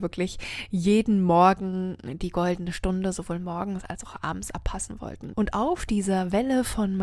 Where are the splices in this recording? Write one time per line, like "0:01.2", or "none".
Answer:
0:05.3